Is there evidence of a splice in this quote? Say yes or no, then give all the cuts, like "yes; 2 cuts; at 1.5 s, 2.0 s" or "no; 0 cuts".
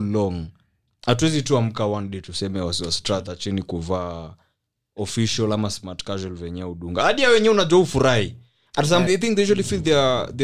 yes; 1 cut; at 9.1 s